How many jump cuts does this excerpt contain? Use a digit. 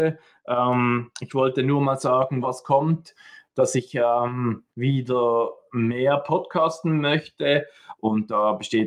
3